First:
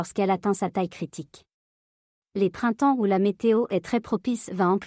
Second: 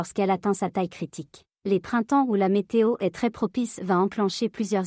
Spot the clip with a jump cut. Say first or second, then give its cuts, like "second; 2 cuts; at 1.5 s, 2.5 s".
second; 1 cut; at 1.5 s